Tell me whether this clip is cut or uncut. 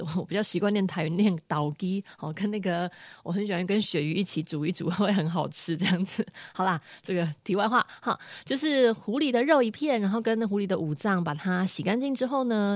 uncut